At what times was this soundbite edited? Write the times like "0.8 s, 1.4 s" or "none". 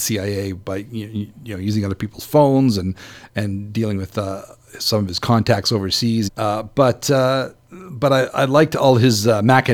6.3 s